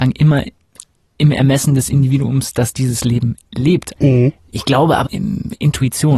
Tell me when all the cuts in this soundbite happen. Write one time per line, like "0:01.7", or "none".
0:04.0
0:05.0